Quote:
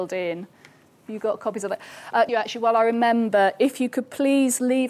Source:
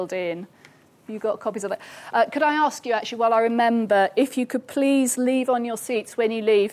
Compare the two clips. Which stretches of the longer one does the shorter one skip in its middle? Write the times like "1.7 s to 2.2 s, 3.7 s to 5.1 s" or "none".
2.3 s to 2.9 s